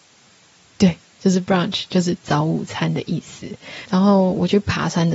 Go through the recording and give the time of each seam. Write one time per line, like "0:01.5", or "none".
0:03.9